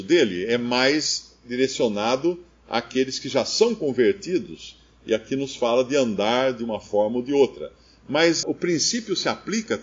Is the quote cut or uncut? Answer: cut